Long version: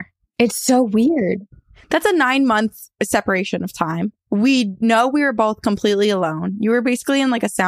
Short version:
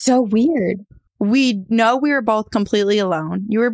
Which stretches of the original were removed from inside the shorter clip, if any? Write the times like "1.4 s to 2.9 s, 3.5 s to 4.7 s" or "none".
1.7 s to 4.2 s